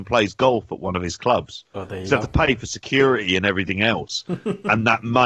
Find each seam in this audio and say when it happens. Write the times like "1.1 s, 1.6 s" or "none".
none